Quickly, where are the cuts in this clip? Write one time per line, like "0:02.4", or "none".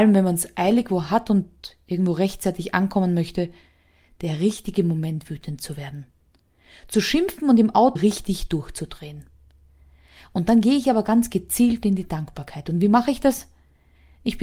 0:08.0